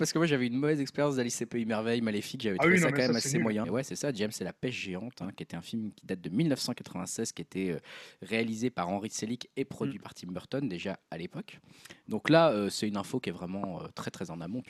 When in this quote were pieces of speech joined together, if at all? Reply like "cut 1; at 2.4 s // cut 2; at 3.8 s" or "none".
cut 1; at 3.6 s